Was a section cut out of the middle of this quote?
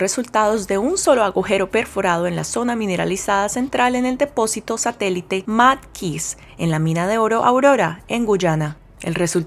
no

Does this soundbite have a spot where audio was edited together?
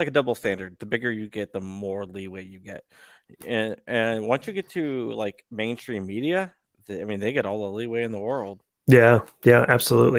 no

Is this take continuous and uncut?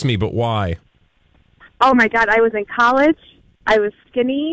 yes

